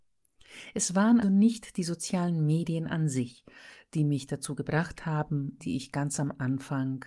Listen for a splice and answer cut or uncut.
cut